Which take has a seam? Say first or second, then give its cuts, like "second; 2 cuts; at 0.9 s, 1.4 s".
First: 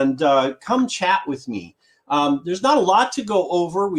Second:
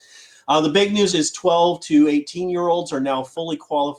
second; 1 cut; at 1.1 s